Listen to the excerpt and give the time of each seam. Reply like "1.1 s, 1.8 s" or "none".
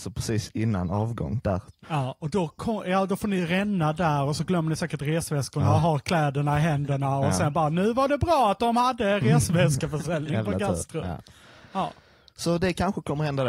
1.8 s

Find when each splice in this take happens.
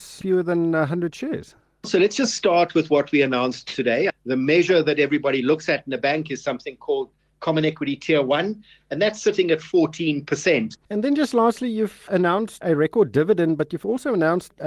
4.1 s, 10.7 s

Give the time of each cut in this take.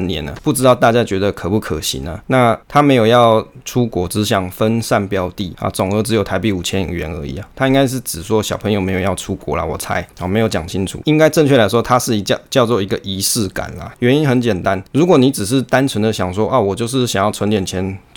11.0 s, 14.0 s

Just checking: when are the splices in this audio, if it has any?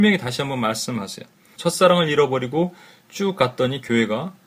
1.6 s

